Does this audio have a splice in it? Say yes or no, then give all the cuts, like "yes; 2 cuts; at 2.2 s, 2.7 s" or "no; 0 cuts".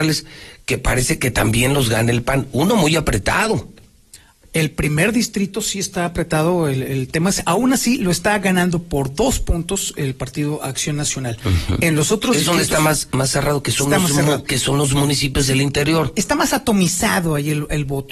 no; 0 cuts